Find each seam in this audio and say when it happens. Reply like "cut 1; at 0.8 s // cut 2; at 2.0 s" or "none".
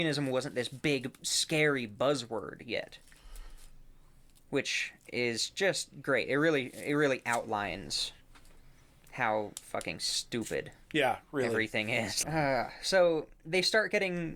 cut 1; at 12.2 s